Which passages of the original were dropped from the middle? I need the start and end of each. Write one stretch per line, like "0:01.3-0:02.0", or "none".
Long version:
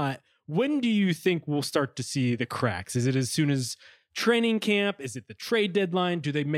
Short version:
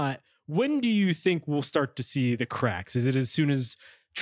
none